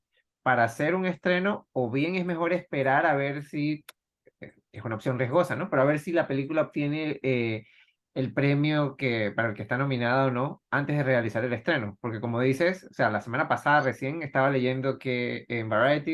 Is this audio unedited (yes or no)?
yes